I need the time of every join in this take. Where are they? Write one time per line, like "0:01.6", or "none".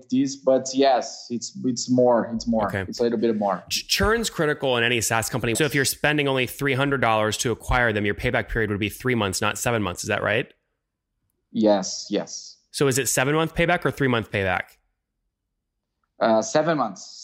0:05.5